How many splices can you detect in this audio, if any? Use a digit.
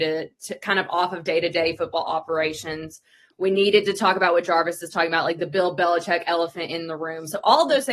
0